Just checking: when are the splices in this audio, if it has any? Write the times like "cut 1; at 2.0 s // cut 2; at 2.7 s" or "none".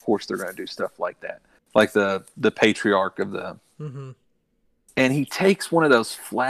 cut 1; at 1.6 s